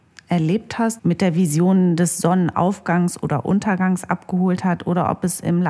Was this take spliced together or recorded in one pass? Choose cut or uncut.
cut